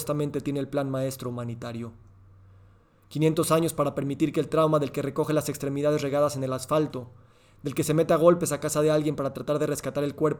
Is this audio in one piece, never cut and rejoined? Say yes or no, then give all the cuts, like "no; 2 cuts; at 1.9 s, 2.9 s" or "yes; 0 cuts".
yes; 0 cuts